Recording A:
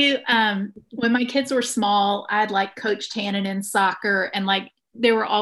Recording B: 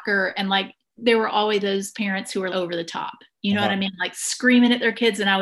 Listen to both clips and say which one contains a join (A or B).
B